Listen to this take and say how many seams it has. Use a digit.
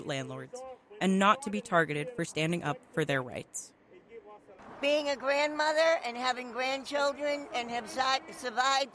0